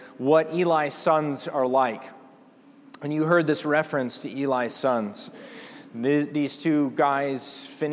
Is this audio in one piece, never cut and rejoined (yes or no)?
yes